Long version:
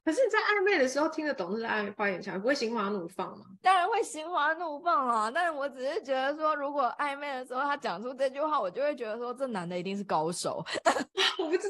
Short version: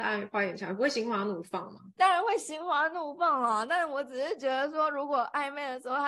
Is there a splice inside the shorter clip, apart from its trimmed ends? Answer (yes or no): no